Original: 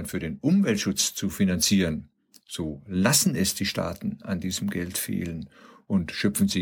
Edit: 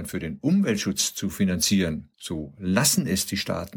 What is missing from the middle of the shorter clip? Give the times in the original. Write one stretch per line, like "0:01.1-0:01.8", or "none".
0:02.1-0:02.4